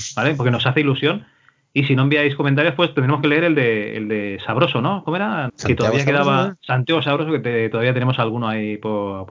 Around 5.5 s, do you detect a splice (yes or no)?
yes